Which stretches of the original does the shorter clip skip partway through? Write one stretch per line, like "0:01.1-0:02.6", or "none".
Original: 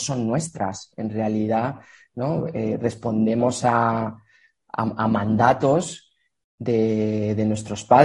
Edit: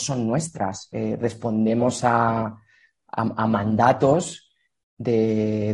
0:00.9-0:02.5

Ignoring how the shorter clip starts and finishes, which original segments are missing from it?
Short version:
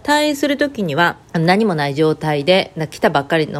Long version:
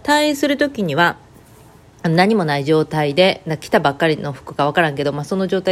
0:01.2-0:01.9

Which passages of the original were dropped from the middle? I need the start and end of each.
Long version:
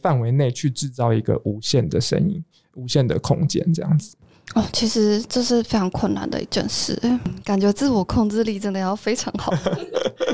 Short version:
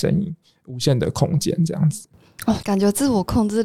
0:04.7-0:07.4

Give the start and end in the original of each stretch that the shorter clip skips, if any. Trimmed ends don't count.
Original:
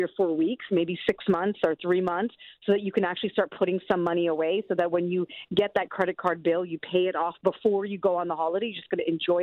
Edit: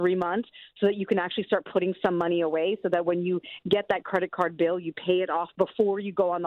none

